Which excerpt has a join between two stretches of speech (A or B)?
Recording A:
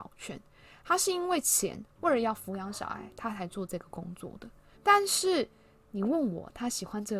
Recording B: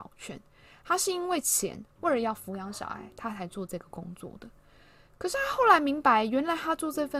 A